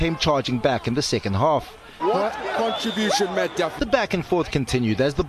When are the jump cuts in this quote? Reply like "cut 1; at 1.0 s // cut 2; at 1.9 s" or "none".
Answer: cut 1; at 2.0 s // cut 2; at 3.8 s